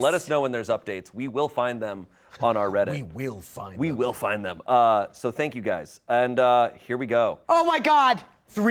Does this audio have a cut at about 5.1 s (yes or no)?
no